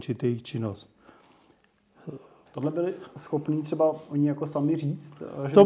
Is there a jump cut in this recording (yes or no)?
yes